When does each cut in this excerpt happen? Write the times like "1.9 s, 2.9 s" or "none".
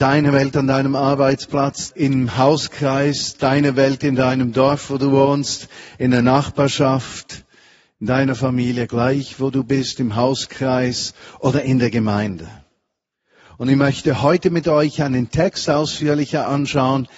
1.9 s